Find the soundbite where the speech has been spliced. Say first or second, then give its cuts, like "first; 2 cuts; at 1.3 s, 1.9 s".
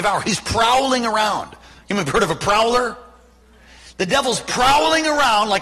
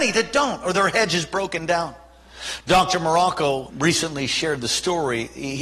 second; 1 cut; at 3.7 s